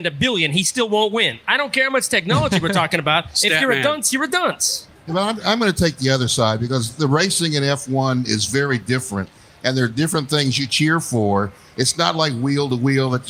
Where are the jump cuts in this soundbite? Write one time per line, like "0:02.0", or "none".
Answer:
none